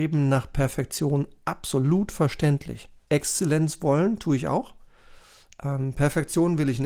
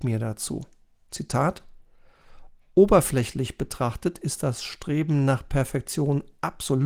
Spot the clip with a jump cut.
first; 1 cut; at 3.1 s

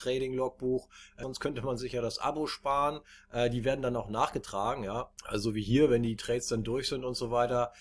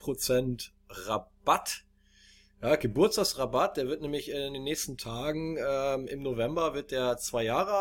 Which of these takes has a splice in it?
first; 1 cut; at 1.2 s

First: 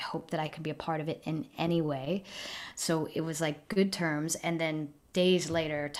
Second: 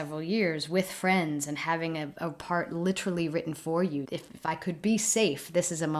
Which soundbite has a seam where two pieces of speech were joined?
second; 1 cut; at 4.0 s

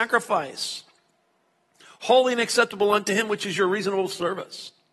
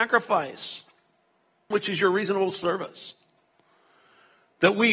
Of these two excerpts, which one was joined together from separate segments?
second; 1 cut; at 1.7 s

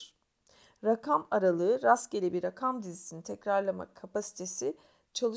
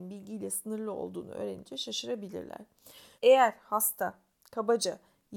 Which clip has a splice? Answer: second; 1 cut; at 3.2 s

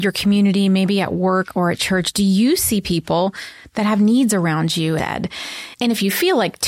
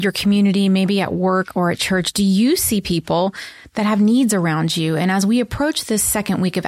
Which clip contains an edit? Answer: first; 1 cut; at 5.0 s

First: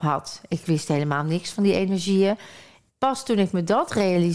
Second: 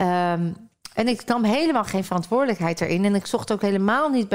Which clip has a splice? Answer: first; 1 cut; at 2.9 s

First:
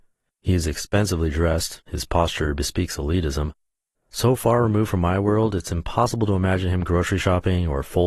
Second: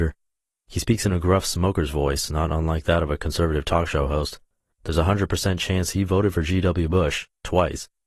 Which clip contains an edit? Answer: first; 1 cut; at 1.9 s

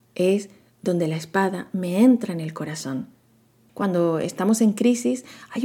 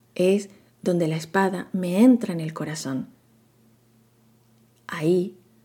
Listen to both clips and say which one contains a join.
first; 1 cut; at 3.7 s

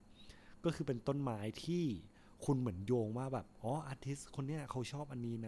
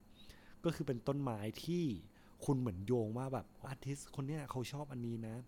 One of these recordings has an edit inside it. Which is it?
second; 1 cut; at 3.6 s

